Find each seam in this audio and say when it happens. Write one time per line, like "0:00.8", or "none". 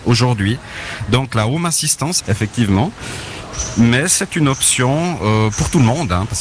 0:02.2